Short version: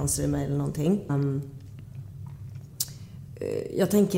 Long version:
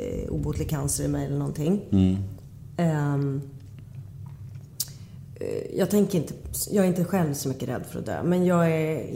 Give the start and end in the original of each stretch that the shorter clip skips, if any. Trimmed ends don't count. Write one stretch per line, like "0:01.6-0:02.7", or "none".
0:01.9-0:03.1